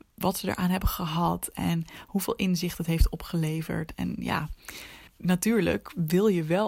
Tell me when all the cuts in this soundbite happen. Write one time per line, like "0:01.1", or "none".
0:05.1

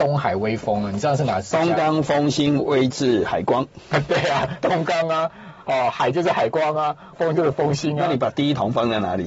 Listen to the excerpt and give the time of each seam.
0:04.6
0:07.1

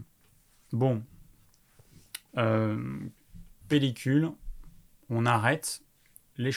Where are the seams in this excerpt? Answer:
0:02.3
0:03.6

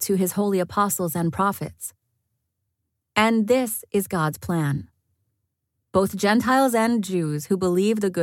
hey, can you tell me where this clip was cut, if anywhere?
none

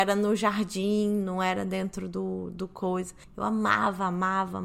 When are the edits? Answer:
0:03.2

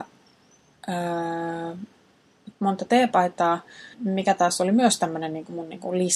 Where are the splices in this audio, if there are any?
0:02.5
0:03.9

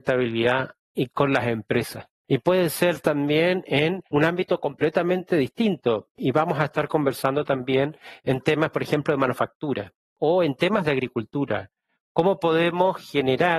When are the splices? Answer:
none

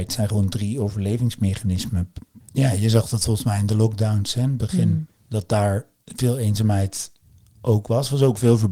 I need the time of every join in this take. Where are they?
0:02.4

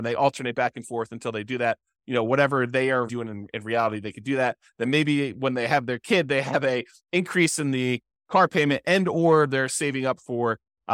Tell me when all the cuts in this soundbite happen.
0:03.1

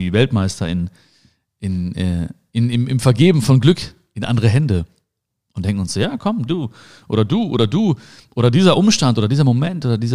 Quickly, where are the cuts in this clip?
0:06.5

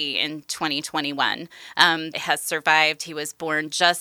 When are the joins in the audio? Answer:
0:02.1

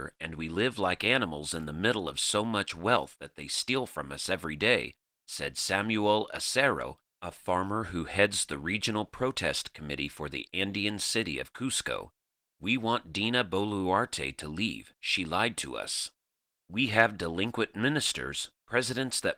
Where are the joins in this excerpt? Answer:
0:16.6

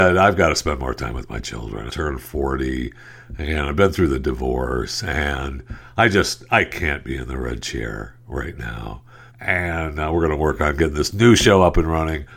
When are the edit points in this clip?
0:01.9
0:09.3

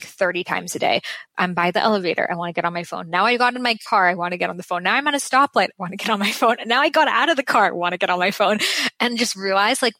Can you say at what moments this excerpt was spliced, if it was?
none

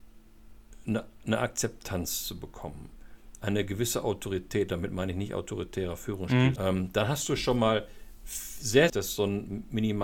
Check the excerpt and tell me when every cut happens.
0:06.6
0:08.9

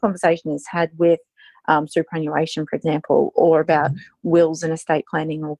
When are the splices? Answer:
none

